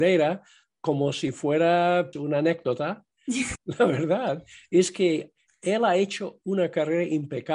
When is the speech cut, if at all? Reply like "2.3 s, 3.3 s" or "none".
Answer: 2.1 s, 3.5 s